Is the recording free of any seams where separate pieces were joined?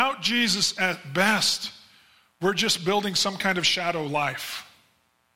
yes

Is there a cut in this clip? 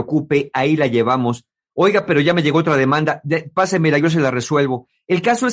no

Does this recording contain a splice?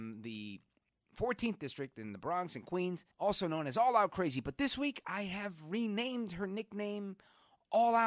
yes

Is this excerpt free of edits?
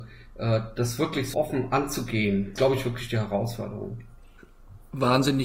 no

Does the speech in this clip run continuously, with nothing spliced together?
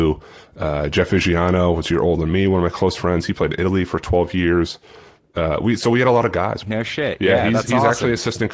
no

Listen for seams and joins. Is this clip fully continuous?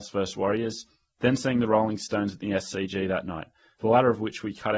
yes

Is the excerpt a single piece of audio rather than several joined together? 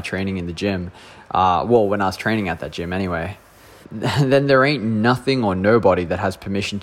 no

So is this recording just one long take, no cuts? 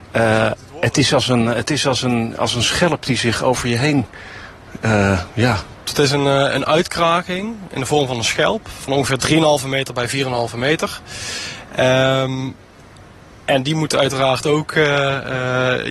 yes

